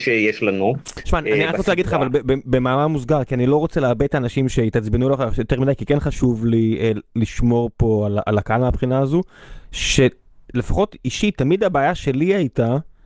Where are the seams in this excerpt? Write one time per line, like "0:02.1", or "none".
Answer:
none